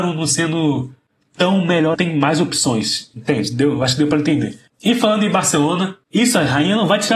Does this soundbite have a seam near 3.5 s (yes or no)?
no